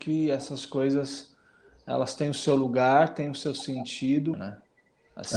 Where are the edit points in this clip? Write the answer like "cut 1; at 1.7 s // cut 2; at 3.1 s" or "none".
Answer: cut 1; at 4.3 s

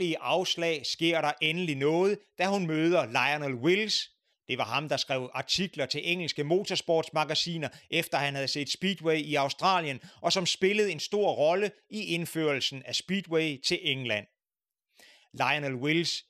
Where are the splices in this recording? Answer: none

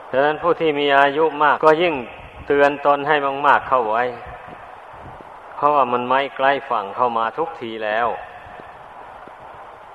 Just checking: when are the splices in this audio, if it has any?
cut 1; at 1.6 s

